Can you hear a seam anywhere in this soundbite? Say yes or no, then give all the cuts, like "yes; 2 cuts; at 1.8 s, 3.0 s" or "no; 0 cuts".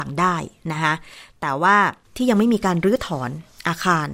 yes; 1 cut; at 2.0 s